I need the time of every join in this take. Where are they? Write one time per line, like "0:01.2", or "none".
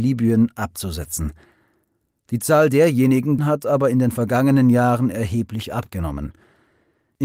0:03.4